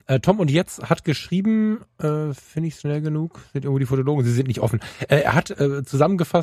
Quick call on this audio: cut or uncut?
uncut